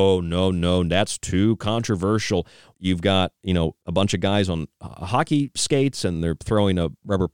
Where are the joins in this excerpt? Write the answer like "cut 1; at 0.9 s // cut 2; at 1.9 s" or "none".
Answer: cut 1; at 2.7 s // cut 2; at 3.8 s